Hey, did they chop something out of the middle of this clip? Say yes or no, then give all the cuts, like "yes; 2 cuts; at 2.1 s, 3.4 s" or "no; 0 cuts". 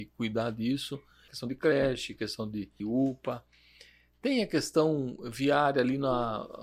yes; 2 cuts; at 1.3 s, 2.8 s